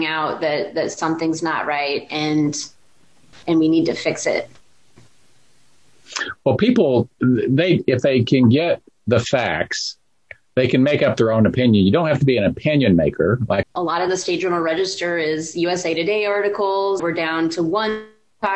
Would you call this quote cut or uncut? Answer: cut